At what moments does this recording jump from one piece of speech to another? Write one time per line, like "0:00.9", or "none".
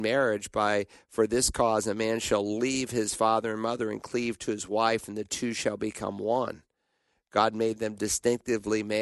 none